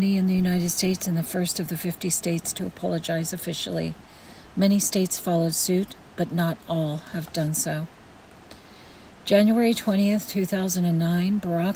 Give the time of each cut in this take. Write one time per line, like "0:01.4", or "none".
none